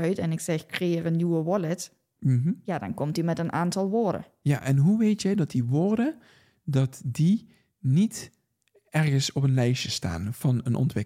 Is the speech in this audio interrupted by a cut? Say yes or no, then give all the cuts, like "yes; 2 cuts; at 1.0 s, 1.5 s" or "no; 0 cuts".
no; 0 cuts